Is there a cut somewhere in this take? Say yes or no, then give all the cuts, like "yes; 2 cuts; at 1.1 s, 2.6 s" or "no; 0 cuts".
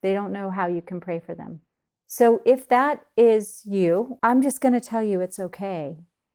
yes; 2 cuts; at 1.9 s, 4.2 s